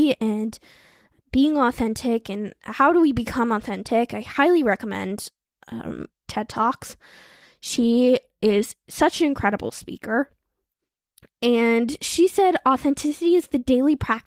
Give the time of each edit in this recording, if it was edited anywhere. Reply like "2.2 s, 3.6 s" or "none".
6.2 s